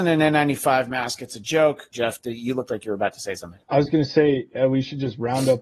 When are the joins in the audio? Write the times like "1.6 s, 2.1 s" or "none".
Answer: 1.9 s, 3.6 s